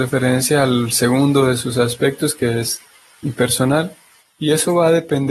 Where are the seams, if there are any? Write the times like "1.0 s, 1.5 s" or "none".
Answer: 4.2 s